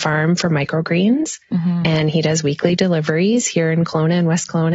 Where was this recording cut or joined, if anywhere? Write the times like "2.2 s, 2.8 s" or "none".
none